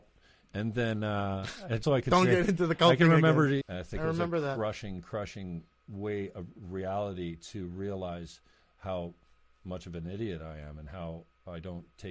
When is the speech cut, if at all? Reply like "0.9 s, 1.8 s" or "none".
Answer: 1.8 s, 3.6 s

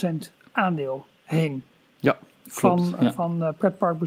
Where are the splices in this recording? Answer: none

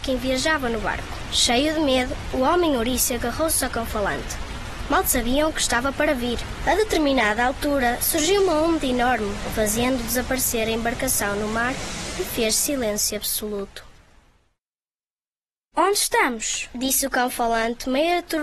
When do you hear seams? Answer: 9.5 s

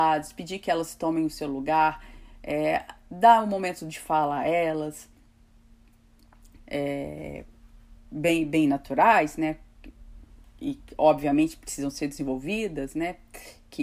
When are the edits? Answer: 6.6 s

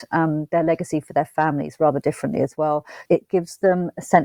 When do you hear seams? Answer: 3.1 s

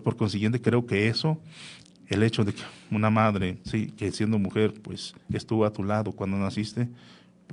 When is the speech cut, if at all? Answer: 3.6 s

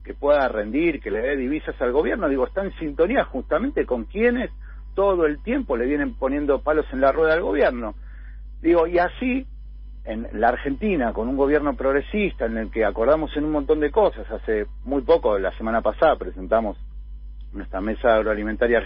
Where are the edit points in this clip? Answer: none

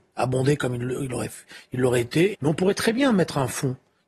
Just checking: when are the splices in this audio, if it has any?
2.3 s

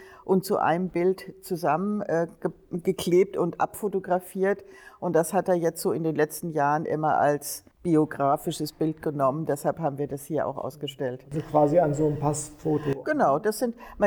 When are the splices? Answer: 7.7 s, 13.0 s

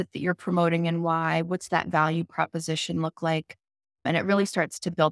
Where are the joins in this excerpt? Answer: 3.8 s

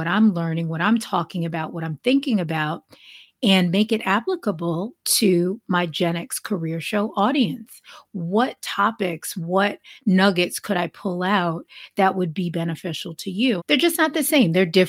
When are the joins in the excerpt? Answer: 13.6 s

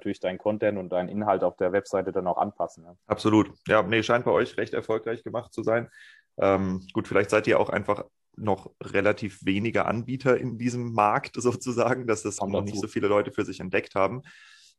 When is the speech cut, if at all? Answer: 3.0 s, 12.4 s

